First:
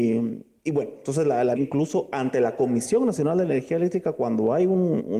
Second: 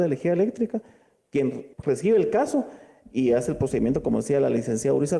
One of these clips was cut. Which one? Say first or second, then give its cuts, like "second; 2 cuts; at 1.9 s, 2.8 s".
first; 1 cut; at 1.6 s